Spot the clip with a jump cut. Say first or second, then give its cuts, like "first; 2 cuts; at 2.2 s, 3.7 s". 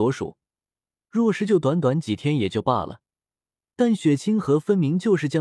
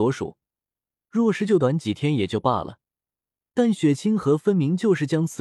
second; 1 cut; at 1.6 s